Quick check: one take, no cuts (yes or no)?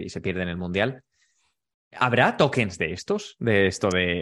yes